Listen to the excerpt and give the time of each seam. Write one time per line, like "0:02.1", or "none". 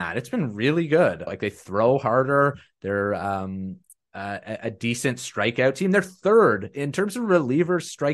0:01.3